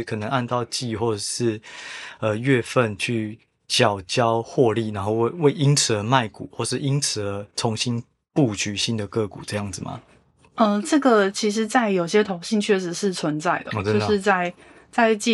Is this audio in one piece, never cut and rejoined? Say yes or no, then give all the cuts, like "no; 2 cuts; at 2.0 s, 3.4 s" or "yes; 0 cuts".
yes; 0 cuts